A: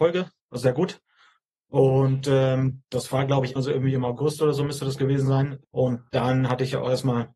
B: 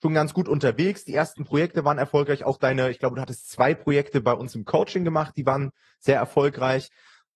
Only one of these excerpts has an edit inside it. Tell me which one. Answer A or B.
A